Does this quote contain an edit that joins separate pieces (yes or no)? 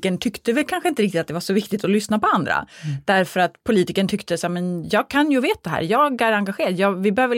no